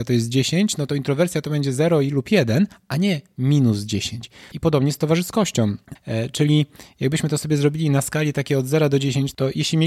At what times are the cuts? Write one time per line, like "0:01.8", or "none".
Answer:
0:04.5
0:06.0